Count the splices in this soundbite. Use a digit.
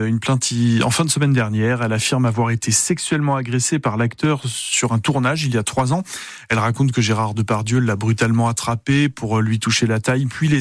0